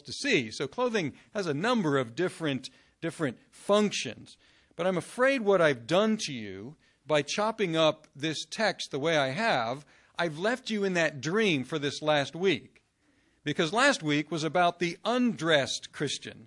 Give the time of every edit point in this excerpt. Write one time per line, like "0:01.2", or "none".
none